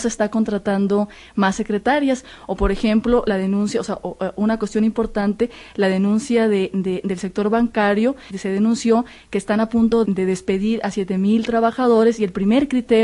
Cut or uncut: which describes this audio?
cut